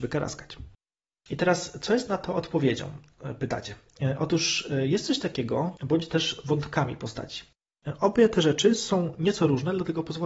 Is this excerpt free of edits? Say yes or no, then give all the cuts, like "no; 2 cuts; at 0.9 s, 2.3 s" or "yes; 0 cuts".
no; 1 cut; at 5.8 s